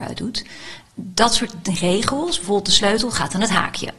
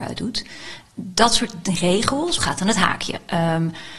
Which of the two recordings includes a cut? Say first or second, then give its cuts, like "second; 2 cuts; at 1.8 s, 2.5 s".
second; 1 cut; at 2.4 s